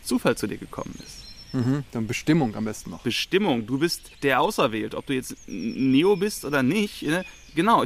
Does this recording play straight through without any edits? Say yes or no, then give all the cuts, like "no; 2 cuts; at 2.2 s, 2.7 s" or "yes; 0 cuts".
no; 1 cut; at 4.1 s